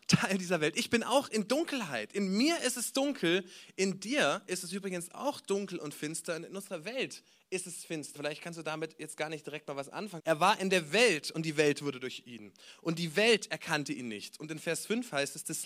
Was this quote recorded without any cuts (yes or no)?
no